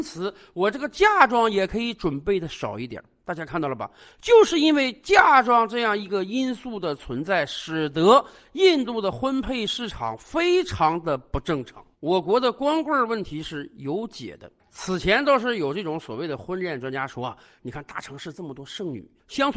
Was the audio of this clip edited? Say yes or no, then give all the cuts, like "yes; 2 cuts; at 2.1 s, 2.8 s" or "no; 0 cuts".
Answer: yes; 1 cut; at 11.9 s